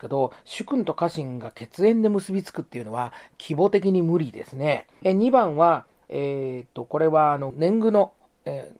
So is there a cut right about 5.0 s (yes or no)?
yes